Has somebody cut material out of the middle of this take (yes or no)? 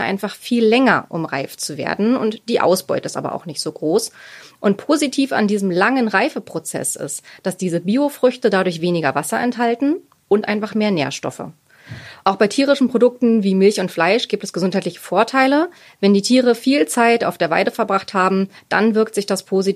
no